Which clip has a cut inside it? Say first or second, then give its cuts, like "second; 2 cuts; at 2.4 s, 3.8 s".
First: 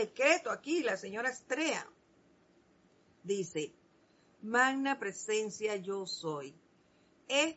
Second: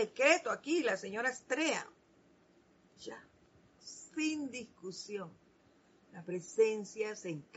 second; 1 cut; at 3.0 s